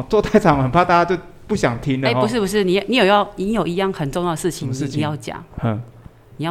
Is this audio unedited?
yes; 0 cuts

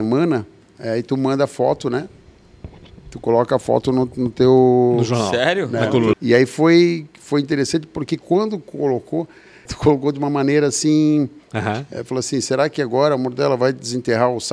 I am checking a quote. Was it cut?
yes; 3 cuts; at 6.1 s, 9.7 s, 11.5 s

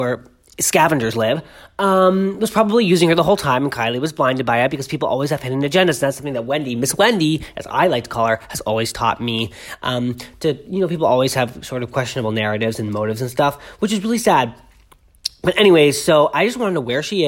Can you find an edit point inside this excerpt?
no; 0 cuts

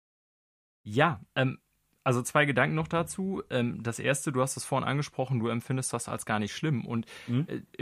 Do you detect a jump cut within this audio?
no; 0 cuts

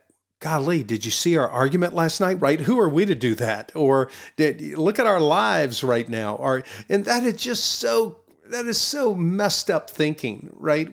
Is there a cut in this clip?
yes; 1 cut; at 2.4 s

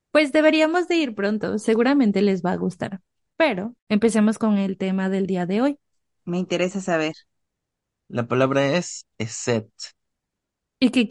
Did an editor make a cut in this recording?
yes; 2 cuts; at 3.8 s, 6.2 s

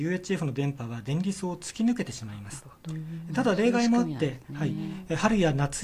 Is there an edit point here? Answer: no; 0 cuts

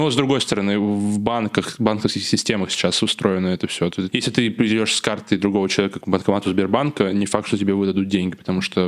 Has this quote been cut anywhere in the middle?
yes; 1 cut; at 6.0 s

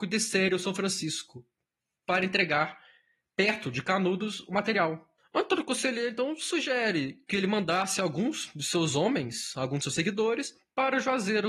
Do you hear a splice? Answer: yes; 1 cut; at 5.2 s

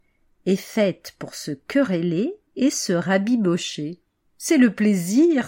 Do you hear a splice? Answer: no; 0 cuts

